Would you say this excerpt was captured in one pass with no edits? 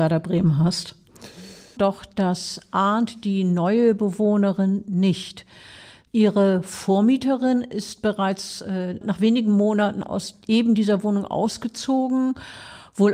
no; 3 cuts; at 1.8 s, 6.1 s, 9.0 s

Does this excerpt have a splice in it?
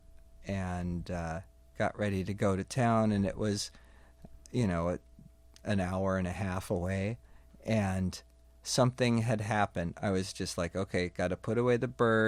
no; 0 cuts

